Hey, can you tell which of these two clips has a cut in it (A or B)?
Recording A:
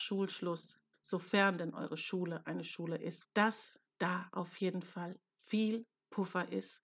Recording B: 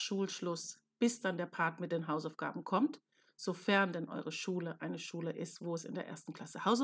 A